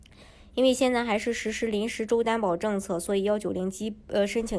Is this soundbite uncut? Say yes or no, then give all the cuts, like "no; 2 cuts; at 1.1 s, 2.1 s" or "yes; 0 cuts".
yes; 0 cuts